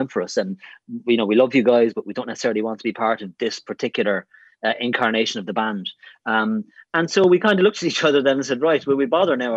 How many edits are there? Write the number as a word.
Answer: zero